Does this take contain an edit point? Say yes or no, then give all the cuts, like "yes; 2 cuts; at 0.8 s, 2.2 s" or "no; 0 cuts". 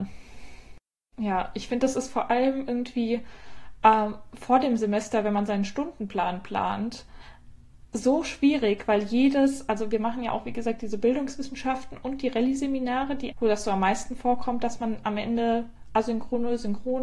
yes; 2 cuts; at 1.1 s, 13.3 s